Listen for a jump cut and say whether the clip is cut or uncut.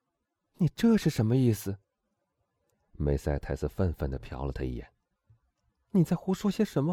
uncut